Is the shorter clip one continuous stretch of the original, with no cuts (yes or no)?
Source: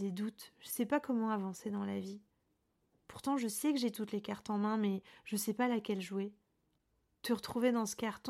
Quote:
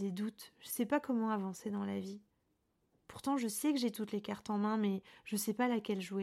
yes